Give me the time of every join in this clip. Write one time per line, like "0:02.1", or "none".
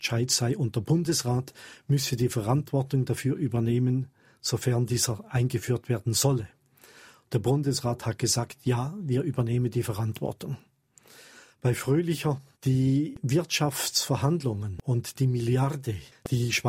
none